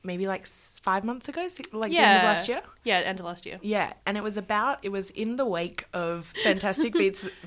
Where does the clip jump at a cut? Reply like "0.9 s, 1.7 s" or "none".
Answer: 6.3 s

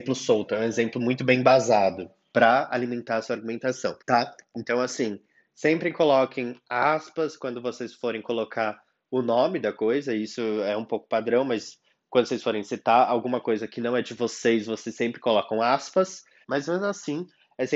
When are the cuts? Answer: 4.0 s, 16.4 s

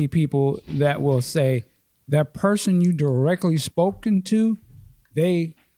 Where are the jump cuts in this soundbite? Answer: none

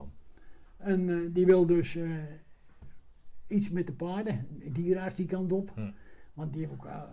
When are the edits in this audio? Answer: none

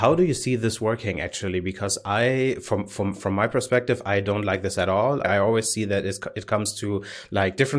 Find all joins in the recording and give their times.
5.2 s

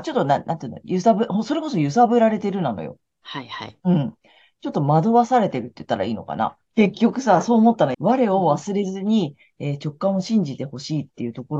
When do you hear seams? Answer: 6.7 s, 7.9 s

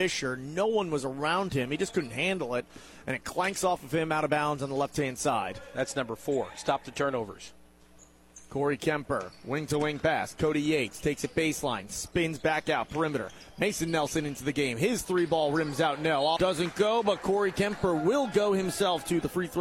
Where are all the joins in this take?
16.4 s

